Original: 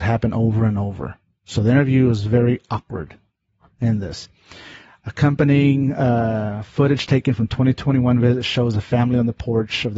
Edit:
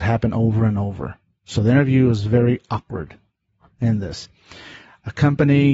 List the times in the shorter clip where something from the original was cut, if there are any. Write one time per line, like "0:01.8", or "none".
none